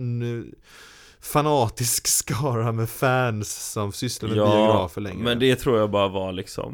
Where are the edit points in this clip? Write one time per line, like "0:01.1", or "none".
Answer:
none